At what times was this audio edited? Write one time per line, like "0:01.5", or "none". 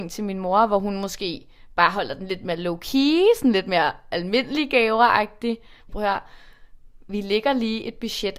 0:05.9